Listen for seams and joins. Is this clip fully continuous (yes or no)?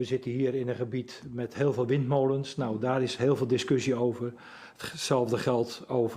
yes